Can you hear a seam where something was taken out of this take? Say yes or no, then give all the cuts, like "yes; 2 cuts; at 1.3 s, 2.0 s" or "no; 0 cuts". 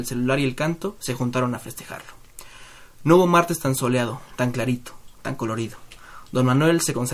no; 0 cuts